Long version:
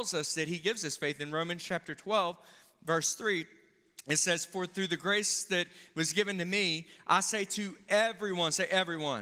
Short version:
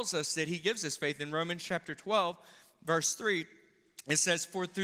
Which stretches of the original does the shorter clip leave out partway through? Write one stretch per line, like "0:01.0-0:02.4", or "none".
none